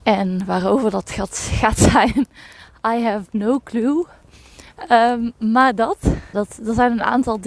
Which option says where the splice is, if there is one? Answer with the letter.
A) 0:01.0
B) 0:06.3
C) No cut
B